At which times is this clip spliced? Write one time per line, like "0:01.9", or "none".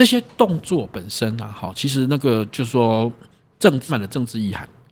0:03.9